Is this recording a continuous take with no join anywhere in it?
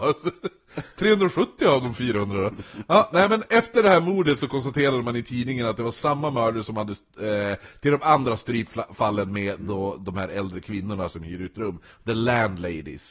yes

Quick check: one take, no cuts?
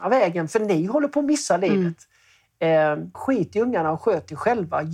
no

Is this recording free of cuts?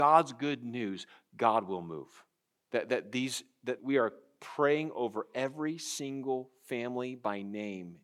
no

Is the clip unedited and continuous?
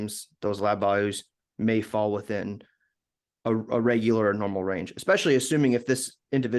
yes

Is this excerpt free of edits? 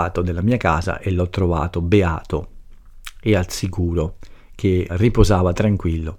no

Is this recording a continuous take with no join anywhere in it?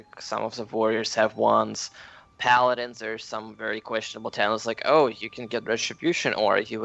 yes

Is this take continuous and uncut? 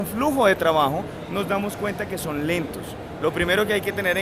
yes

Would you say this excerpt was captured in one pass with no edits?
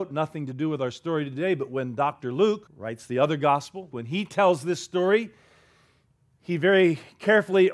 no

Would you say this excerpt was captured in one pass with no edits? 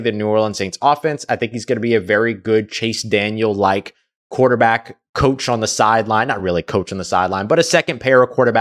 yes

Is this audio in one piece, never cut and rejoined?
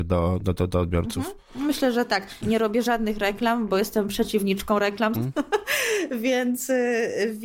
no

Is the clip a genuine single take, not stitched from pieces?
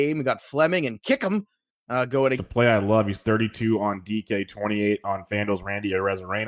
no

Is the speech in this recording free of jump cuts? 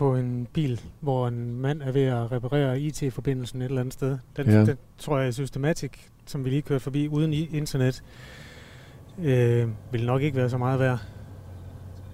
yes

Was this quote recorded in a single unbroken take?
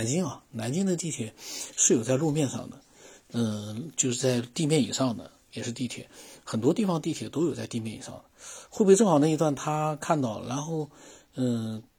yes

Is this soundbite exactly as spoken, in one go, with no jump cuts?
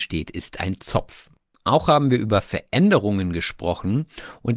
no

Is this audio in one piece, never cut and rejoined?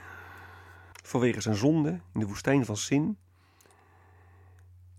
no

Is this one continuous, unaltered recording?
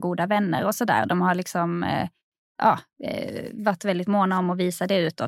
yes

